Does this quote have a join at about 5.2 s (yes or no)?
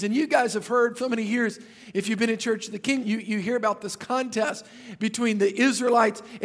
no